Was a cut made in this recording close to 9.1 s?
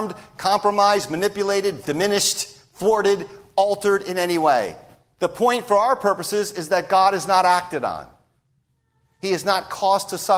no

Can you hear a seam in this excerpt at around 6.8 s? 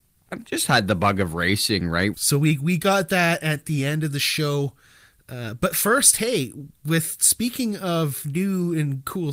no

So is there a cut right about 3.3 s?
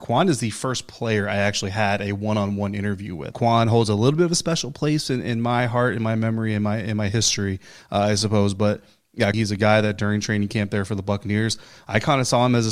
yes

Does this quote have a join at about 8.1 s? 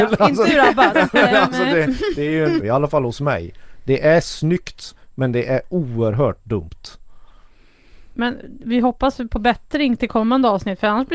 no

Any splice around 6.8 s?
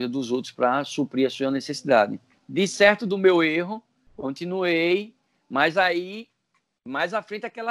no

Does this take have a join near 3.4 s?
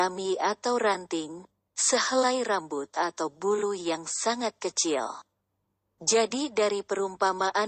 no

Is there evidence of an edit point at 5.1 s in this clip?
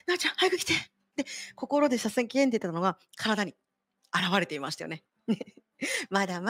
yes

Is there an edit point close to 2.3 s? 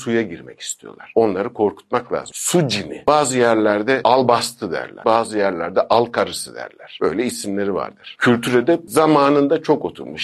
yes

